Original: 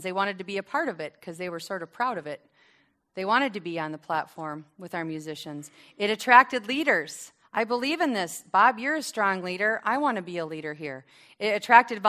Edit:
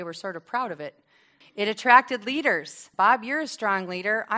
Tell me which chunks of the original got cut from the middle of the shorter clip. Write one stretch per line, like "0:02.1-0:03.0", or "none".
0:02.9-0:05.8
0:07.4-0:08.5